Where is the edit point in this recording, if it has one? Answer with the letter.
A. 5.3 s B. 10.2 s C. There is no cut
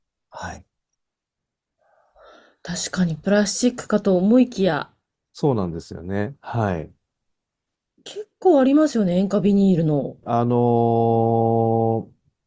B